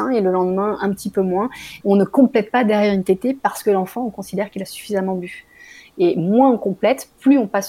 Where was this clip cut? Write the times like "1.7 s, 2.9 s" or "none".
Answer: 1.8 s